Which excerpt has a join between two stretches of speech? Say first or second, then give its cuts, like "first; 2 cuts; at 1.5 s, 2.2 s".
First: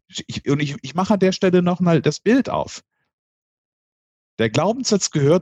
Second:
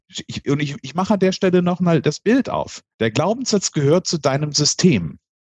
second; 1 cut; at 2.9 s